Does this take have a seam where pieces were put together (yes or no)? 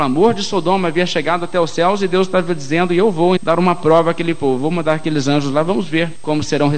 yes